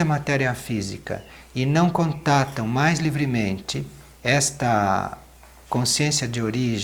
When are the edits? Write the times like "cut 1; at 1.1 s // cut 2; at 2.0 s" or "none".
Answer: none